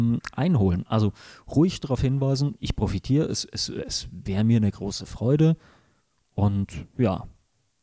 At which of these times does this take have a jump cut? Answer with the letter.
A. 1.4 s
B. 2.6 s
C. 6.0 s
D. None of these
D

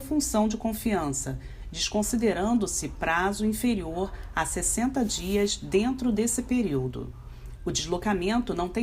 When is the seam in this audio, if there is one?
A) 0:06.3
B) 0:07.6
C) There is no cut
B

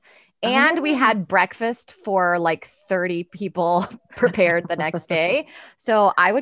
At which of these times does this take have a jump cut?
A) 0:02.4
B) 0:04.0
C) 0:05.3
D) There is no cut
D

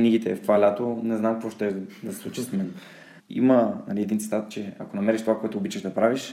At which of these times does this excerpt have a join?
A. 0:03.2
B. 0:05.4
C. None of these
A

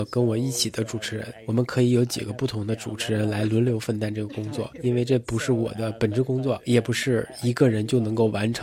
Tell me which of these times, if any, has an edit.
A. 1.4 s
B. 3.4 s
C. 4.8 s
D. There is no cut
D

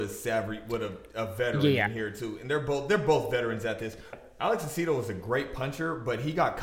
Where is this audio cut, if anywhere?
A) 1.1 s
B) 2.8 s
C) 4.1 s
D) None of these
C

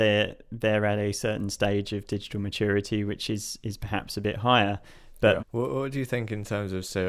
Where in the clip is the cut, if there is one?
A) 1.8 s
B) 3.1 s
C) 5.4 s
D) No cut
C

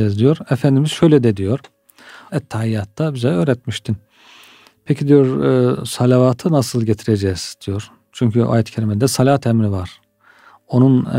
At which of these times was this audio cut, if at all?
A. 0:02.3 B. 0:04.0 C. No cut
A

